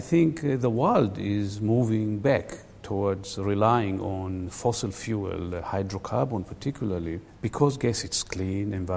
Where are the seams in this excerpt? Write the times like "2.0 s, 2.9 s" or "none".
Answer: none